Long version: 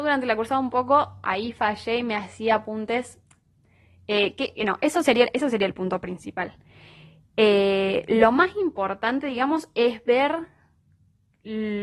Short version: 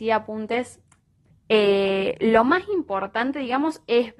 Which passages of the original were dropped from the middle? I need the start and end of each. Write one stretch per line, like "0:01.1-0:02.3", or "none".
0:03.7-0:07.2